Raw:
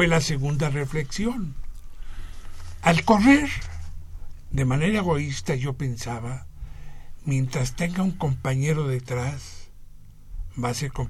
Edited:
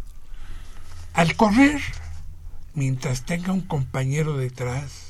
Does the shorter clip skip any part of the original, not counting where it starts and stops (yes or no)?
yes